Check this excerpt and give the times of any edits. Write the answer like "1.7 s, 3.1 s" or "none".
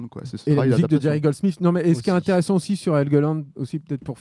none